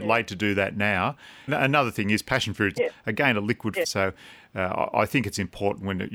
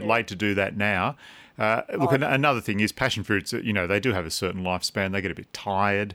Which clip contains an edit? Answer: first; 3 cuts; at 1.5 s, 2.8 s, 3.8 s

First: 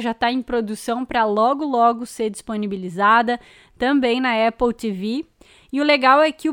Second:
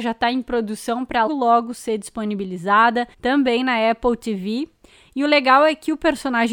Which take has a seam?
second; 2 cuts; at 1.3 s, 3.1 s

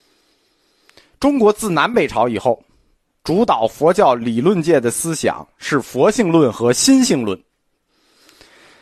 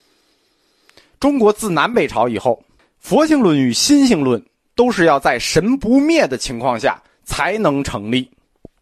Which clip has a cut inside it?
second; 1 cut; at 2.8 s

